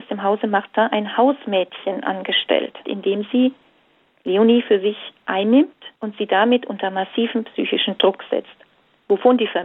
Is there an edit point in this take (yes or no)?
yes